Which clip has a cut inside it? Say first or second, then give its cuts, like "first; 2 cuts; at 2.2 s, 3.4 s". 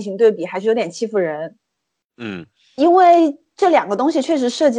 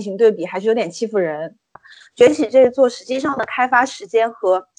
second; 1 cut; at 1.8 s